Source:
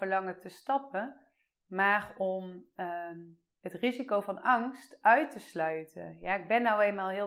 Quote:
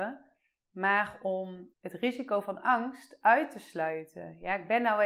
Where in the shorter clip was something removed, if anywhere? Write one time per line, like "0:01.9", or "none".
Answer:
0:01.7